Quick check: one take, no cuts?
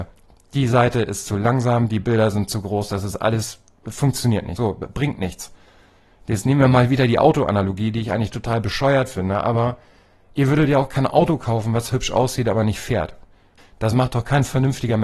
no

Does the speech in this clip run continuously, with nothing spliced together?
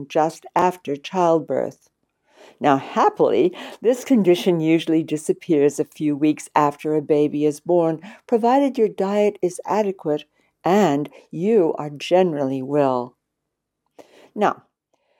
yes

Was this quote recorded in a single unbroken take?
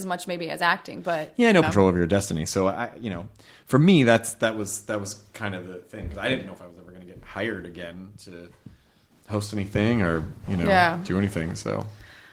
no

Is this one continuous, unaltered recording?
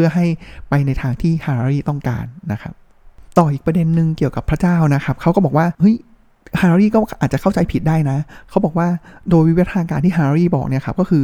no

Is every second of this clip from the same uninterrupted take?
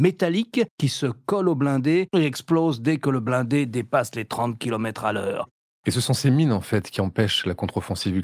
yes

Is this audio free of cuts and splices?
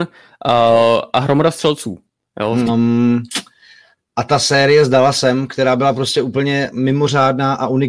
no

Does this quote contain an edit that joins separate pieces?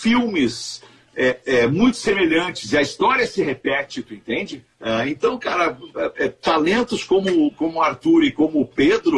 no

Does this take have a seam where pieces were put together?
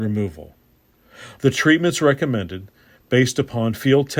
yes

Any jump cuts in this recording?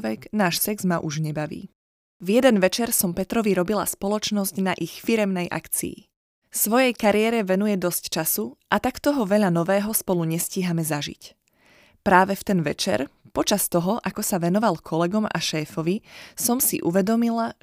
no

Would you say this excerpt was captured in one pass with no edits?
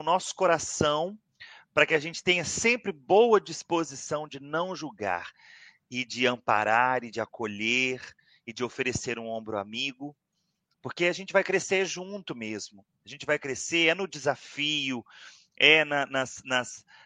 yes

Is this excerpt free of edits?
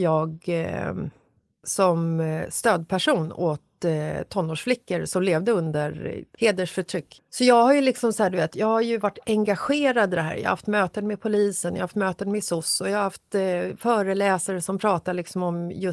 yes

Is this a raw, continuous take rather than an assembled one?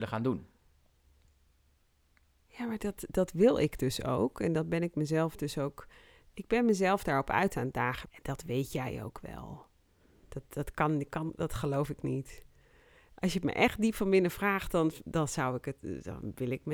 no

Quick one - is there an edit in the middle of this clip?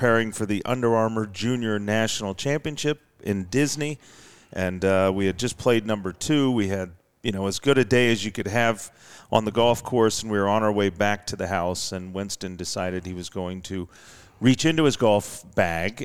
no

